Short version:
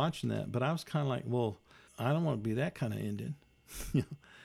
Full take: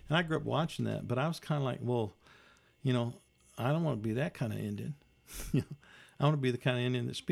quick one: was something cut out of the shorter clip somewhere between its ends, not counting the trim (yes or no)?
yes